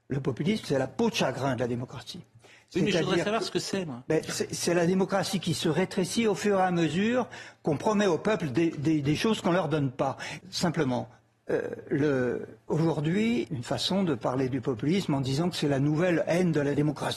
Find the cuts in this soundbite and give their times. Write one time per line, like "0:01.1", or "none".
0:10.4
0:13.5